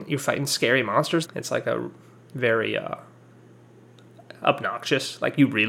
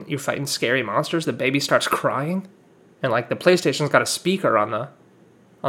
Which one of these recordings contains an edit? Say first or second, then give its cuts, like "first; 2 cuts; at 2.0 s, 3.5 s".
first; 1 cut; at 1.2 s